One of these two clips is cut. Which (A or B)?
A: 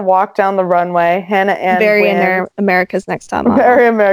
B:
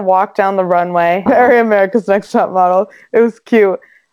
B